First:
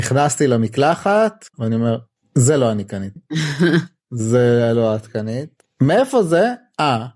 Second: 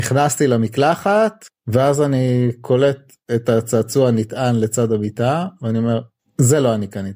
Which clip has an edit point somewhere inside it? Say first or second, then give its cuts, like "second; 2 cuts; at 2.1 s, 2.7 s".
first; 1 cut; at 1.5 s